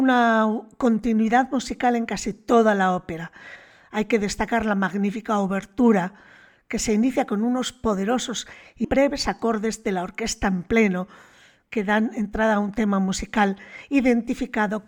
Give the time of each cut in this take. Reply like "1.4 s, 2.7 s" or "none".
8.8 s